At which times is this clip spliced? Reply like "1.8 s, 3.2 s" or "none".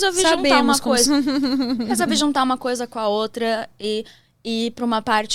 1.1 s